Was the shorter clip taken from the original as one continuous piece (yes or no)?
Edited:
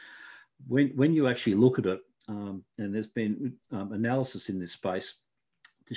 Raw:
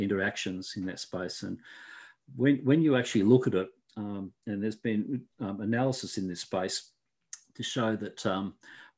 yes